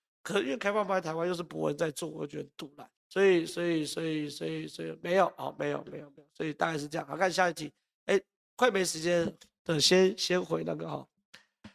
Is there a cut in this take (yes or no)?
yes